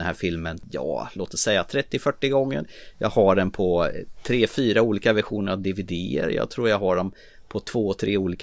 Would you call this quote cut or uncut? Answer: uncut